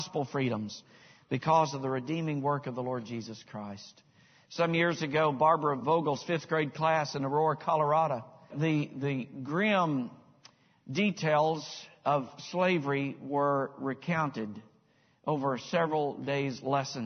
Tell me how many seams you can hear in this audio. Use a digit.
1